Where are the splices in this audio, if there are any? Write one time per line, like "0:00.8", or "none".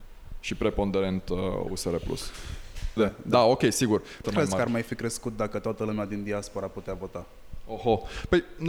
0:03.0
0:04.2

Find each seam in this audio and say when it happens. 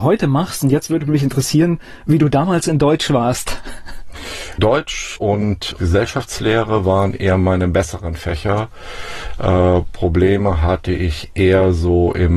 none

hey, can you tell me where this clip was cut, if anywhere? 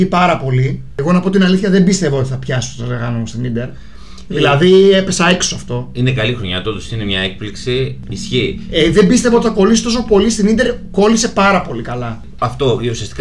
0:08.1

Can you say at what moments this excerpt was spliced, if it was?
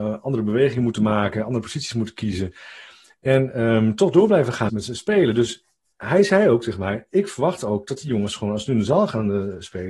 0:04.7

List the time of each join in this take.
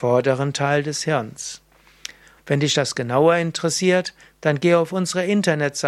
0:02.4

